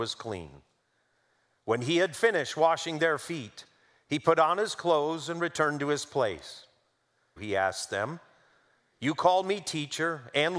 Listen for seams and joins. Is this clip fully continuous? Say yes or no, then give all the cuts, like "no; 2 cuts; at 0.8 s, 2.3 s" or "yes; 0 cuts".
no; 1 cut; at 7.4 s